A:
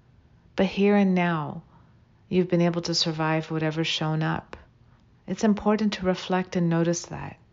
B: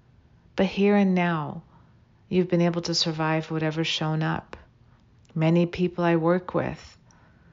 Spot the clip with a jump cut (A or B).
B